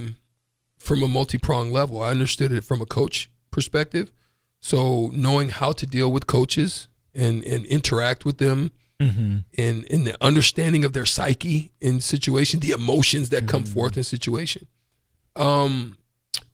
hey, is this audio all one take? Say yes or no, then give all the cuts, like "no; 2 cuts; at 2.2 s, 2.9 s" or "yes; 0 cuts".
yes; 0 cuts